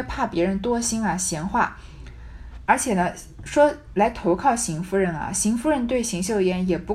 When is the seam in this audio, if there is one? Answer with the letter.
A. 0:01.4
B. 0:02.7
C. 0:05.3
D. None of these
B